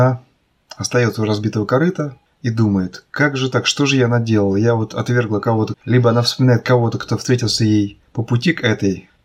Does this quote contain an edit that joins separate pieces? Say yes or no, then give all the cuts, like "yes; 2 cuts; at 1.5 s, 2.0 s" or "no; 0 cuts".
yes; 1 cut; at 5.7 s